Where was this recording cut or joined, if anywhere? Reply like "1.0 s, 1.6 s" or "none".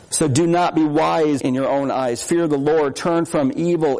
1.4 s